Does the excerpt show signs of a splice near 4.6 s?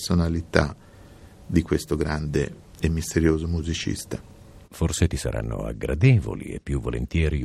yes; 1 cut; at 4.6 s

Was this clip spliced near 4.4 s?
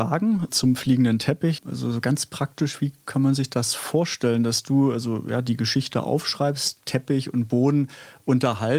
no; 1 cut; at 1.6 s

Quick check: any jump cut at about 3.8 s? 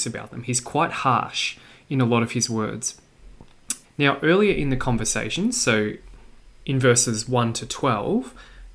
yes; 1 cut; at 3.8 s

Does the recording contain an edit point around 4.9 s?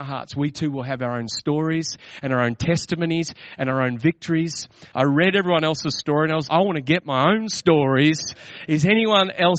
yes; 2 cuts; at 4.9 s, 6.5 s

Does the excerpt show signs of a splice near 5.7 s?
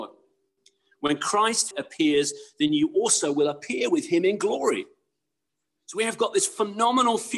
no; 1 cut; at 1.7 s

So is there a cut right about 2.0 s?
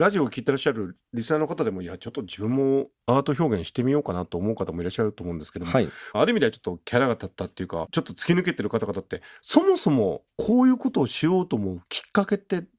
no; 1 cut; at 6.1 s

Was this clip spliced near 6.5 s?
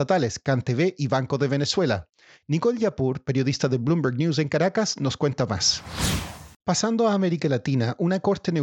yes; 1 cut; at 6.5 s

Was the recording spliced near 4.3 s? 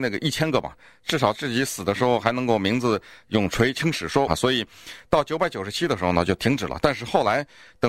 yes; 1 cut; at 4.3 s

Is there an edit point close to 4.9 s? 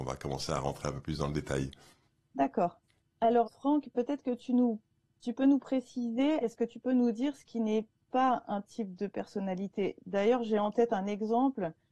no; 2 cuts; at 3.4 s, 6.4 s

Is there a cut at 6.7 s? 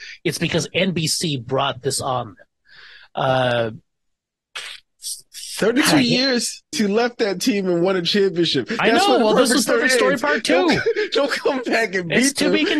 yes; 1 cut; at 6.7 s

